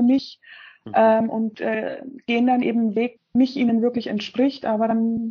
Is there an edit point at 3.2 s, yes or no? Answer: yes